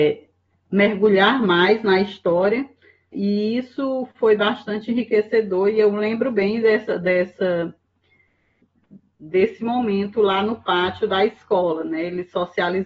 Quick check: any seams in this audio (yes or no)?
yes